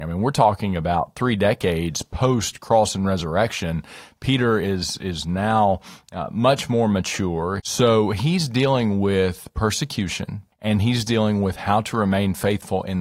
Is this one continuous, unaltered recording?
no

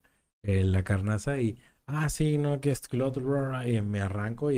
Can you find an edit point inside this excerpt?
no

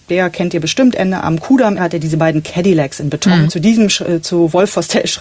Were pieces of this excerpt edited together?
yes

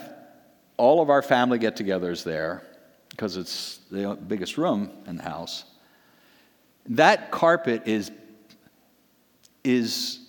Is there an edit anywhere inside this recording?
no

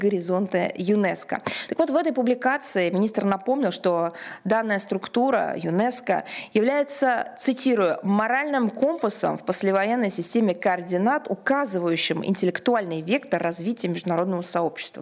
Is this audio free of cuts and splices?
yes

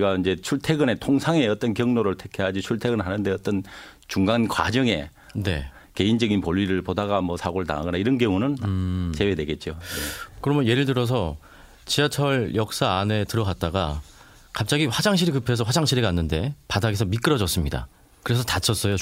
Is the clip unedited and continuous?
yes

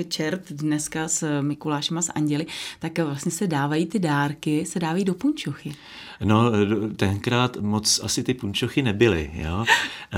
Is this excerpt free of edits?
yes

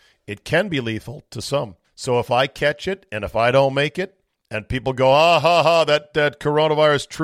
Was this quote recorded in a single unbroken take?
no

